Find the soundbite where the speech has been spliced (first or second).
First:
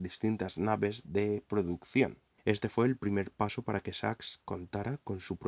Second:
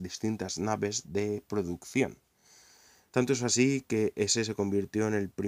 first